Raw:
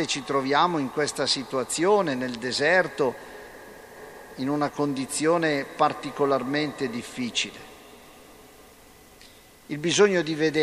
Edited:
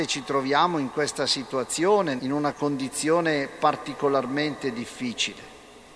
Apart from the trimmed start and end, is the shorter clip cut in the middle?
yes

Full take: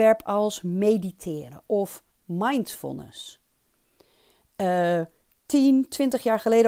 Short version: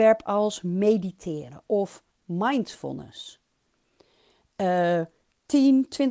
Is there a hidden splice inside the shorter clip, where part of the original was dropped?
no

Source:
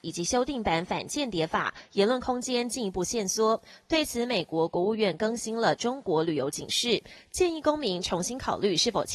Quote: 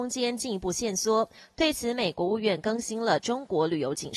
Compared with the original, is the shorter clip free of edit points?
no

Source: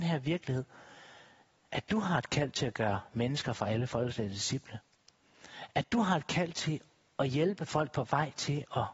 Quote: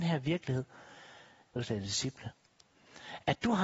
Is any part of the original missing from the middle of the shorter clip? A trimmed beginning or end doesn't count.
yes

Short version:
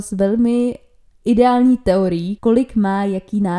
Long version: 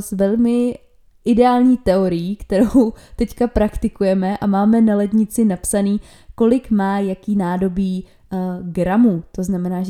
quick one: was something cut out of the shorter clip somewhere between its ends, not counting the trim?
yes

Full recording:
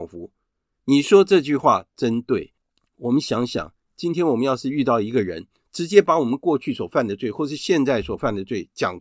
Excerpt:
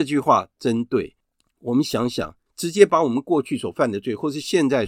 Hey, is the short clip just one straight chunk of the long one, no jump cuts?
no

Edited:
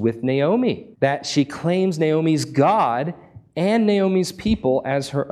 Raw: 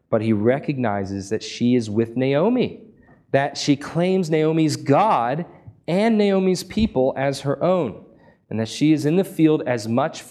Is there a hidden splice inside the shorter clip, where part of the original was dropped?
yes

